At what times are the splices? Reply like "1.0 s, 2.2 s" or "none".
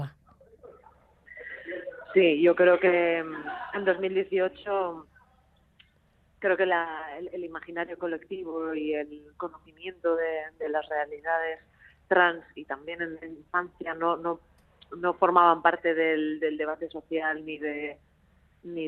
none

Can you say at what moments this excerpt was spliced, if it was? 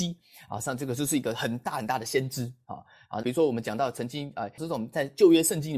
3.2 s, 4.6 s

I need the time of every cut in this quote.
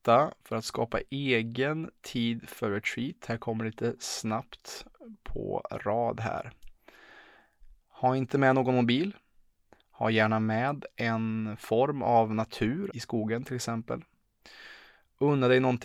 9.8 s, 12.9 s

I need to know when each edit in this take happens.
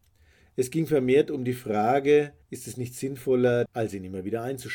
2.4 s, 3.7 s

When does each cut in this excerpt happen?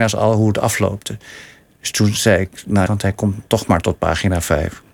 2.9 s

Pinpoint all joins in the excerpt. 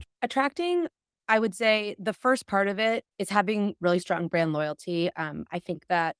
3.1 s

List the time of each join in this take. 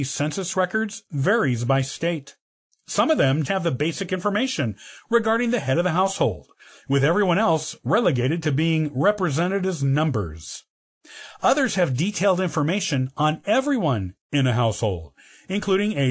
3.4 s

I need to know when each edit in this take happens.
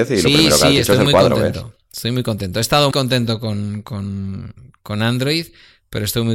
2.9 s

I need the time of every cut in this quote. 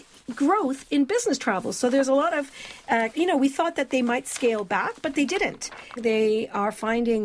3.1 s, 6.0 s

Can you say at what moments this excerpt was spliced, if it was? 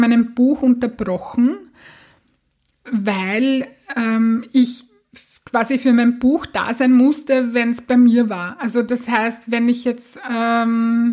none

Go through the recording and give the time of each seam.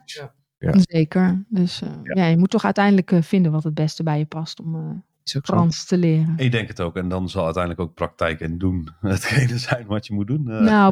none

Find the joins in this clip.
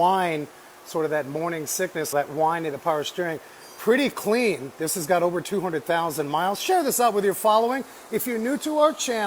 2.1 s

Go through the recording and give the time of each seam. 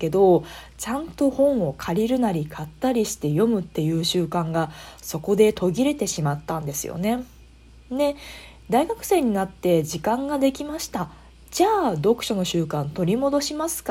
none

